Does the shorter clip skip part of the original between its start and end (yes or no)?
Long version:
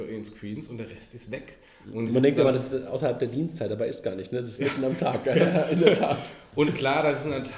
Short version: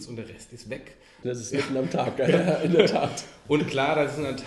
yes